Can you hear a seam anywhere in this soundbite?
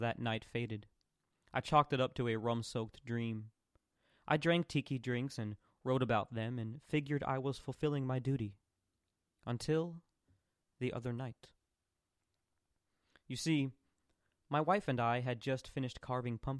no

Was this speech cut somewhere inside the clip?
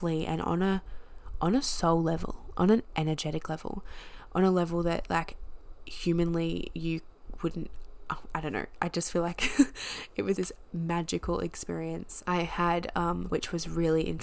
yes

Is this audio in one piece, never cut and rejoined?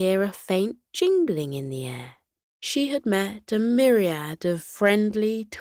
no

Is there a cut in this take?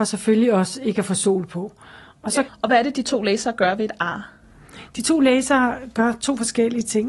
yes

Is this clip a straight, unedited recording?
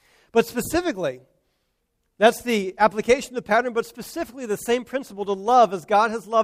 yes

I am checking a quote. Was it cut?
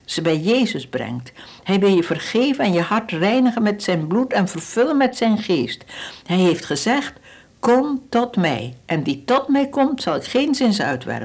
no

